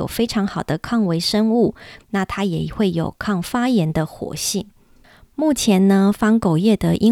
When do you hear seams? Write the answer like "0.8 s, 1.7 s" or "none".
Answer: 2.0 s